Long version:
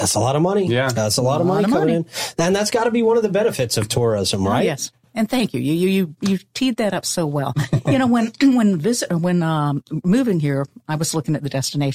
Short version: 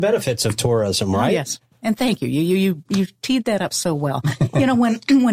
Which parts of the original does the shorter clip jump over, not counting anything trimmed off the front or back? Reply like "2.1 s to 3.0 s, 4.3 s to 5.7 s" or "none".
none